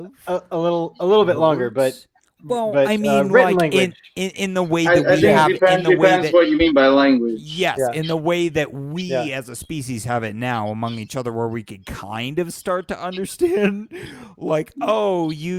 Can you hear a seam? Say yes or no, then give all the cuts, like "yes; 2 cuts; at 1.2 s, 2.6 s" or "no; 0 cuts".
no; 0 cuts